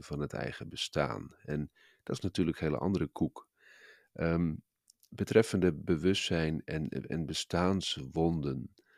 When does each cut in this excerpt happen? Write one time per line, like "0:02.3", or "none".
none